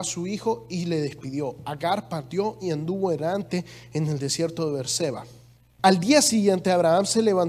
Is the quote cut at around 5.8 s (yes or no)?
yes